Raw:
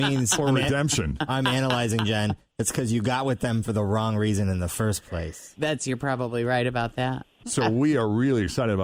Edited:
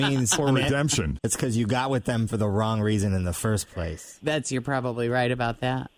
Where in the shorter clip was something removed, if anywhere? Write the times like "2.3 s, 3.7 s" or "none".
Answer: 1.2 s